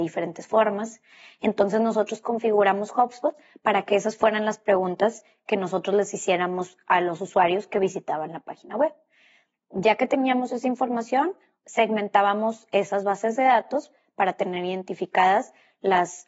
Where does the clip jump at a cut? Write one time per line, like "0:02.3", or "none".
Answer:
none